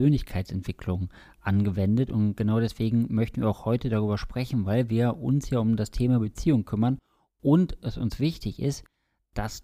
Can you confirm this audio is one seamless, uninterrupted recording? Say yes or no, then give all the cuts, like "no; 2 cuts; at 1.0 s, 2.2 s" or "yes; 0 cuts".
yes; 0 cuts